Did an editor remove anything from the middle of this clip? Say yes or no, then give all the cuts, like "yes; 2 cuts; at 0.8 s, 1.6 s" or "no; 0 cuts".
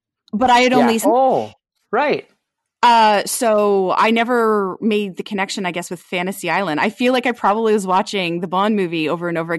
yes; 1 cut; at 1.0 s